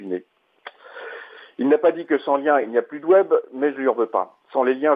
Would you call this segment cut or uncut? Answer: uncut